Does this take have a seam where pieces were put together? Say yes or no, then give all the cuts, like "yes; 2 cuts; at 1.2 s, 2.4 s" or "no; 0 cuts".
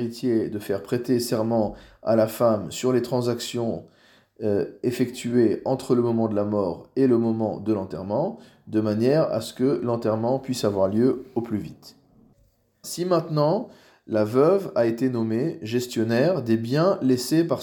yes; 1 cut; at 12.8 s